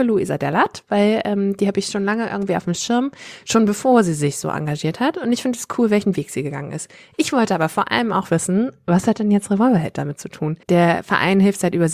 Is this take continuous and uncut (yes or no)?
no